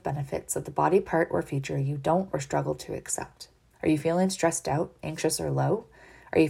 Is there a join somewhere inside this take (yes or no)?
yes